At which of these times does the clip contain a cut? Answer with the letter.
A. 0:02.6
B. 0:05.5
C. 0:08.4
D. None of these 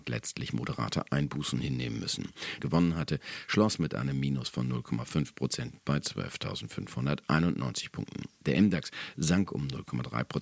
A